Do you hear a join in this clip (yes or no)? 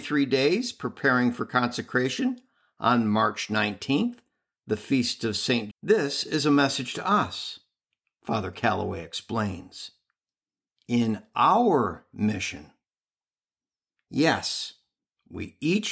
yes